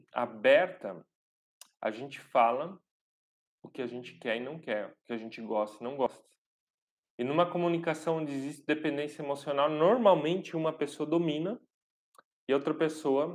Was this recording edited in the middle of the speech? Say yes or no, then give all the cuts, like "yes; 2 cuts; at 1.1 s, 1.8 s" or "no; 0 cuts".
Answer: no; 0 cuts